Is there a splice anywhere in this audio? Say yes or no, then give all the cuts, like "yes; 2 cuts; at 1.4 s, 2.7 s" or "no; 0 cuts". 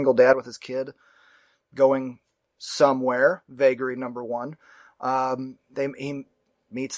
no; 0 cuts